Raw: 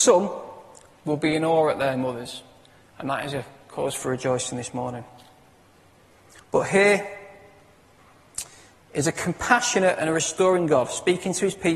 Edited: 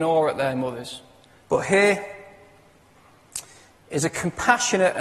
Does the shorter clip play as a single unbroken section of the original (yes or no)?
no